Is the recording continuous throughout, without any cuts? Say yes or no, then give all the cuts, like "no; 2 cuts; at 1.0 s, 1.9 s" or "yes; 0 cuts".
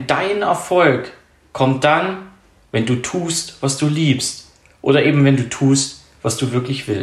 yes; 0 cuts